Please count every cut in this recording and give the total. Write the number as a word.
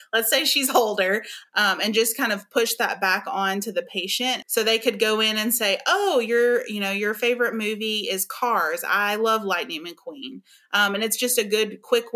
two